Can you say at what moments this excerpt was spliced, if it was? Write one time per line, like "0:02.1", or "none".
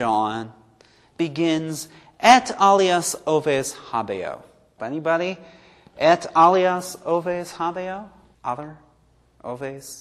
0:04.8
0:08.3